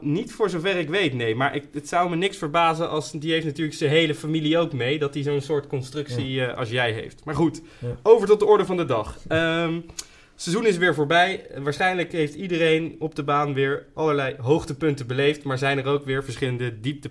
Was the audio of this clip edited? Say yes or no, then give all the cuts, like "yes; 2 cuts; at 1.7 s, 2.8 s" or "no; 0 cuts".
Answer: no; 0 cuts